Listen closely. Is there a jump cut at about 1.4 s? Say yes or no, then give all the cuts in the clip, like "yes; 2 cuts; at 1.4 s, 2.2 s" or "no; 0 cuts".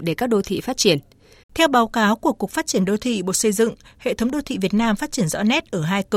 yes; 1 cut; at 1.4 s